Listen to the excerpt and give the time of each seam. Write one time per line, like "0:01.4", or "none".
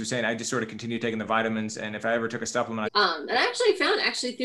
0:02.8